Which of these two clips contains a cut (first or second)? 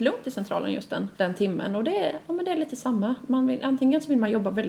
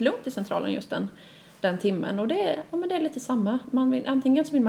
first